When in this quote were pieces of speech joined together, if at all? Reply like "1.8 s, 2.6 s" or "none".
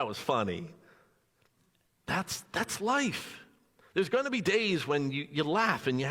none